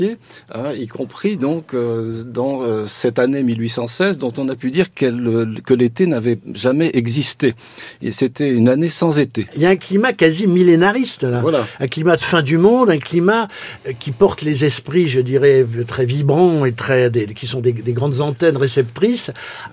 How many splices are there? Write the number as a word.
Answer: zero